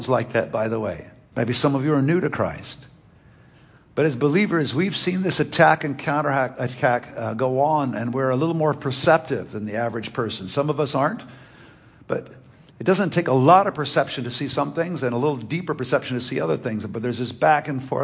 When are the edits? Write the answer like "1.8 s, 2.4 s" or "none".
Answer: 1.3 s